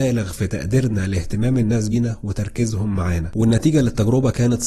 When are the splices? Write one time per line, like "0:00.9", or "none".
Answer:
0:01.9